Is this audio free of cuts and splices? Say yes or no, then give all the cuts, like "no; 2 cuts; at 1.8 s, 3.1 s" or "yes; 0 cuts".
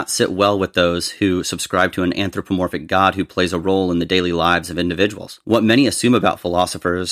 yes; 0 cuts